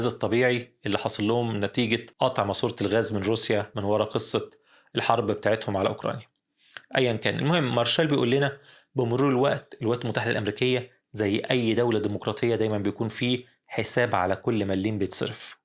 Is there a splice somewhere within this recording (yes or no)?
yes